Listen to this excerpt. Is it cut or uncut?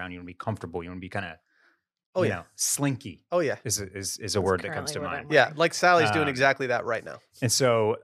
uncut